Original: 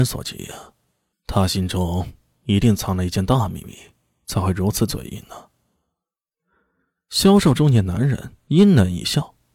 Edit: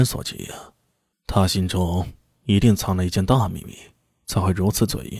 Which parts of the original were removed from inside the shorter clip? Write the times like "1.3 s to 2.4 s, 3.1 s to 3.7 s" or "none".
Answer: none